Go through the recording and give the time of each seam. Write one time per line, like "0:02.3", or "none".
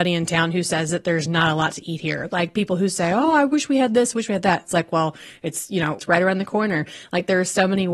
0:06.0

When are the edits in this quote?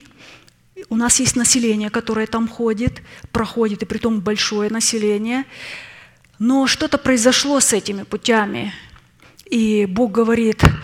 none

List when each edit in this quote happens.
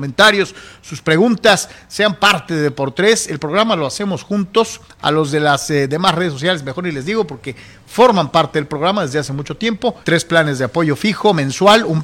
0:10.0

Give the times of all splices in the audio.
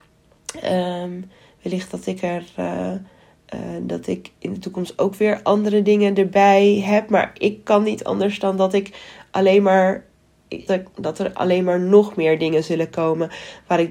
0:10.7

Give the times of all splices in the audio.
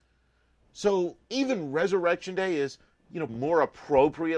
0:01.2
0:03.3

